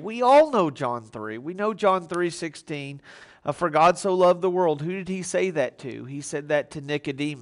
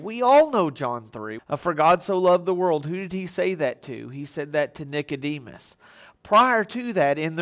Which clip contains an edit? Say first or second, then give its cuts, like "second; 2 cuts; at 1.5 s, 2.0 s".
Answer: second; 1 cut; at 1.4 s